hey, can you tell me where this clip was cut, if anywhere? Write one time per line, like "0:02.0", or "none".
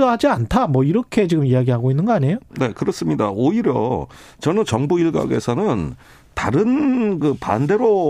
none